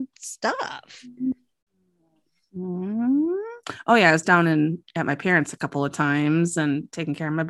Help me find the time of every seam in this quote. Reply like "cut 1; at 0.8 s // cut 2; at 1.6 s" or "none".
none